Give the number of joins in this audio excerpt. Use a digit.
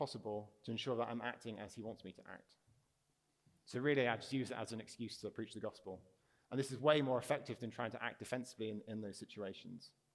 0